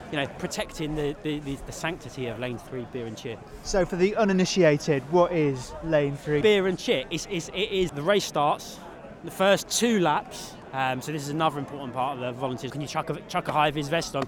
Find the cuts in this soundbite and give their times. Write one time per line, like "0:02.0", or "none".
0:06.4
0:07.9
0:12.7